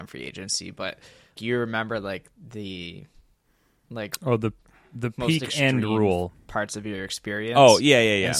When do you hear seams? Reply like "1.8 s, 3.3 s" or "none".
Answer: 1.4 s